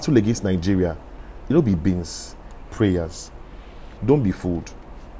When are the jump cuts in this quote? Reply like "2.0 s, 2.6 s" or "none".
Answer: 2.7 s, 4.0 s